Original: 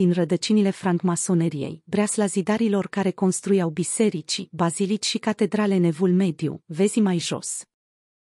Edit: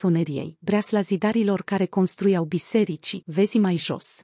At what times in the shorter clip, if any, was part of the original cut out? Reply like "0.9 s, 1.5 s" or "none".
3.2 s